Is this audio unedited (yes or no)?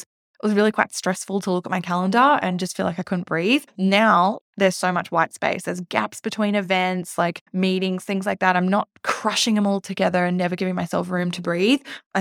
yes